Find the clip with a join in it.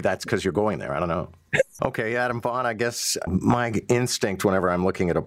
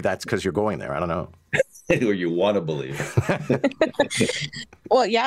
first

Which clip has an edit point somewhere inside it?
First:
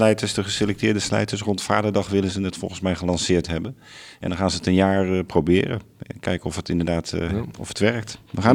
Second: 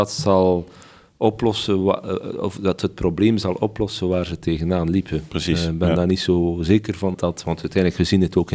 second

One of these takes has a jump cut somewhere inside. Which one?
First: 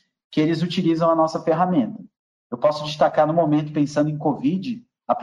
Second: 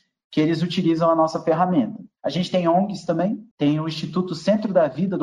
second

